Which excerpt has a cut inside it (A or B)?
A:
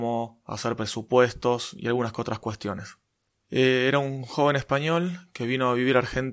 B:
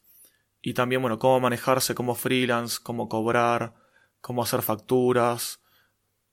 A